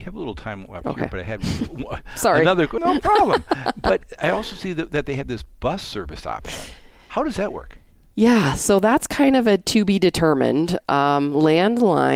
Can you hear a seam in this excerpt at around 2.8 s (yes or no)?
yes